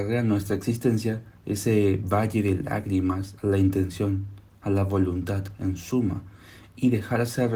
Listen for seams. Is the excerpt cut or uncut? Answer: cut